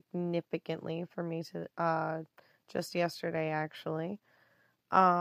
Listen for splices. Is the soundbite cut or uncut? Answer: uncut